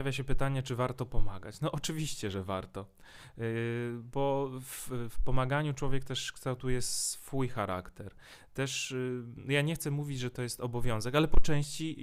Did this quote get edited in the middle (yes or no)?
no